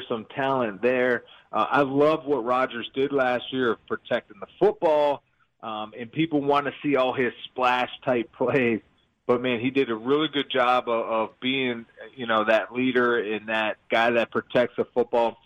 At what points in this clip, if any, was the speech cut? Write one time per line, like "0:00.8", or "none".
none